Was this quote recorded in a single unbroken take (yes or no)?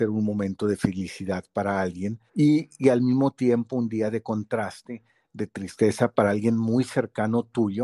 no